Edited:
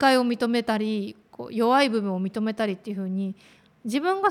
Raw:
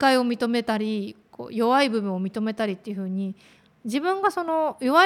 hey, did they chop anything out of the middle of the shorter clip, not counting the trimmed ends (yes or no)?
no